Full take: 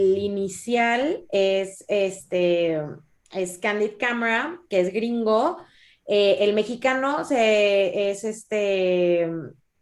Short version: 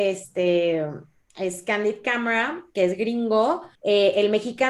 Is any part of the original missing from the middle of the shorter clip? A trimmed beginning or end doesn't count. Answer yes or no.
yes